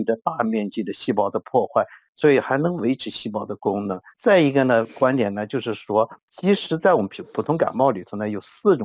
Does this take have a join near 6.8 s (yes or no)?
no